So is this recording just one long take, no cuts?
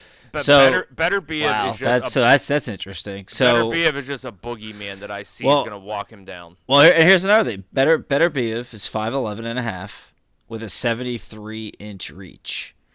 yes; 0 cuts

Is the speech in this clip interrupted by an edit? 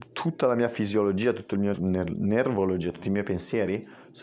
yes; 1 cut; at 1.7 s

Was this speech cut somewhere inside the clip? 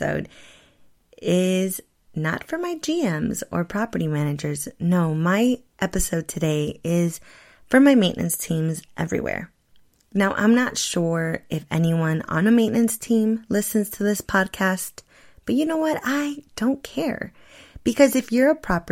no; 0 cuts

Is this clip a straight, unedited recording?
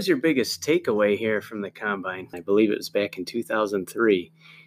no; 1 cut; at 2.3 s

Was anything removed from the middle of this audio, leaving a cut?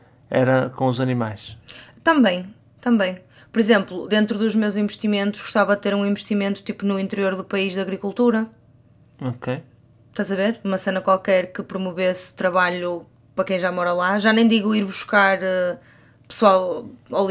no; 0 cuts

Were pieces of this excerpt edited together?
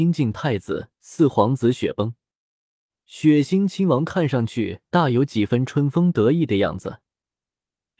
yes; 1 cut; at 0.9 s

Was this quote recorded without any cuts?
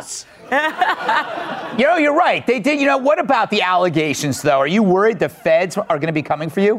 yes; 0 cuts

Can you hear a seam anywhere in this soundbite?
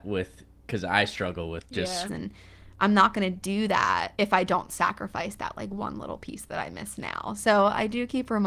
yes; 2 cuts; at 2.1 s, 4.1 s

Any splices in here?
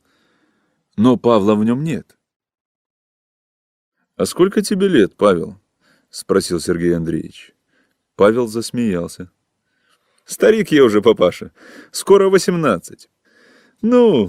no; 0 cuts

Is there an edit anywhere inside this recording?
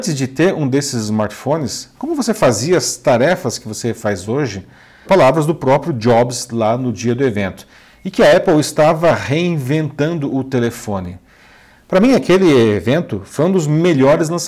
yes; 1 cut; at 5.0 s

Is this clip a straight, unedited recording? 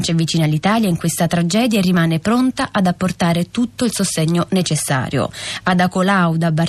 yes; 0 cuts

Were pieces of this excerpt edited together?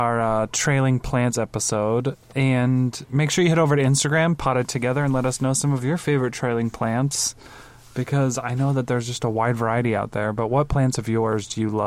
no; 0 cuts

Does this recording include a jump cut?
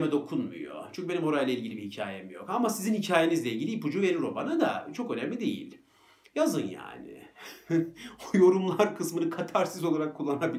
no; 0 cuts

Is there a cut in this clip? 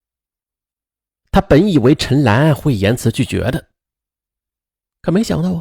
yes; 1 cut; at 1.2 s

